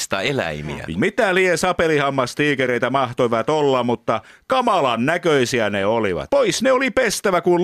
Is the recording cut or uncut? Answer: cut